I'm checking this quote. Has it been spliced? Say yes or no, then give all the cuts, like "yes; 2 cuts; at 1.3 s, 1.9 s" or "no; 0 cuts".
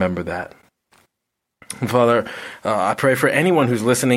no; 0 cuts